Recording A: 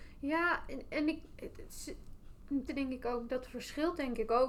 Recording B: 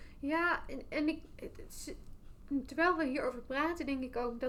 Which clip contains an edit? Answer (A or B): A